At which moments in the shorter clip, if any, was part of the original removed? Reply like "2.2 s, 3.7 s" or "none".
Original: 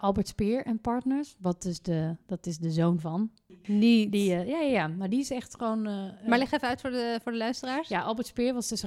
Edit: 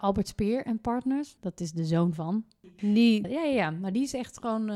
1.4 s, 3.2 s